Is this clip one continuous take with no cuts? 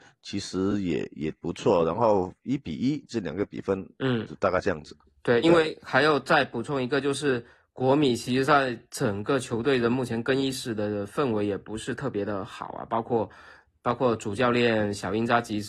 yes; 0 cuts

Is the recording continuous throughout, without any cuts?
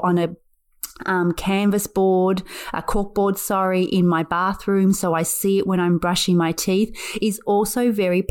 yes; 0 cuts

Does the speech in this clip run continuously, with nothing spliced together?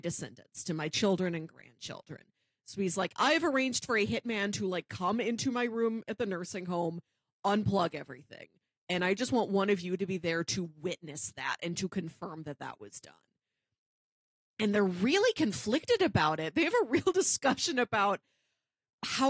yes; 0 cuts

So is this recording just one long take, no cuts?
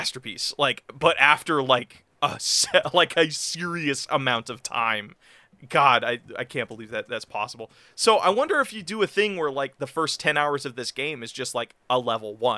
yes; 0 cuts

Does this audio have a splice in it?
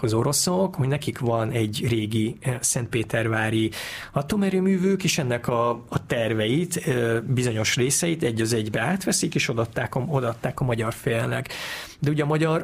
no; 0 cuts

